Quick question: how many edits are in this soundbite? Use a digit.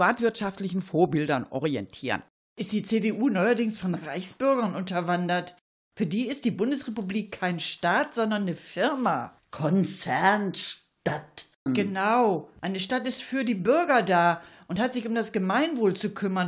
1